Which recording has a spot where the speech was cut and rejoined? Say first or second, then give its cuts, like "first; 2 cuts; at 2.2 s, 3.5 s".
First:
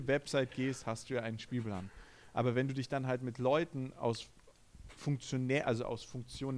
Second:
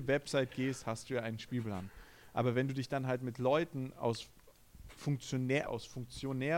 second; 1 cut; at 5.7 s